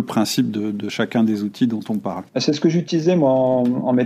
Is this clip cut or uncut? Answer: cut